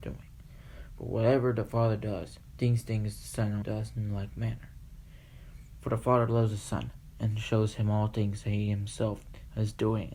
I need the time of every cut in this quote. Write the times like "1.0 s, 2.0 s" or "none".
3.6 s